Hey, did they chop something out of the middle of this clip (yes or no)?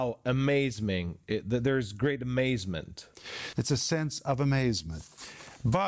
yes